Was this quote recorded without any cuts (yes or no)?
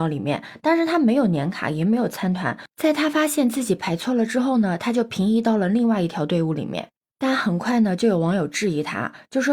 yes